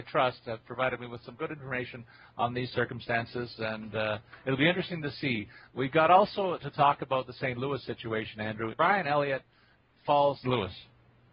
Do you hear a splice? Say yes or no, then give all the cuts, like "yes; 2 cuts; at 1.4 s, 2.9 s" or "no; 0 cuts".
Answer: yes; 2 cuts; at 8.7 s, 10.4 s